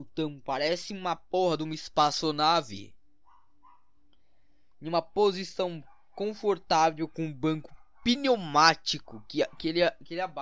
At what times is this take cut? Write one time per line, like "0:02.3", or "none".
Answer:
none